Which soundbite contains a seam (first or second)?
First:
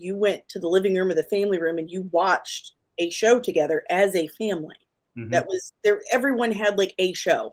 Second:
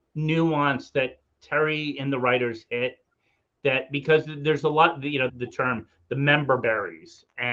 second